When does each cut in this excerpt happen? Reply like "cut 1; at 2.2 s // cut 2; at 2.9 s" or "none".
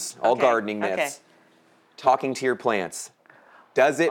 none